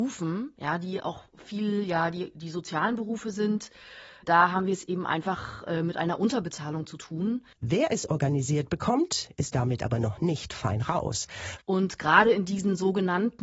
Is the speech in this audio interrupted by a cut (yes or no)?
yes